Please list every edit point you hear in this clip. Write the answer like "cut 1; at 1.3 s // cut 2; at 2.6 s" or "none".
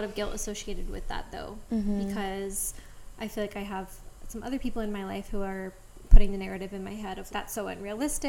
cut 1; at 6.0 s // cut 2; at 7.3 s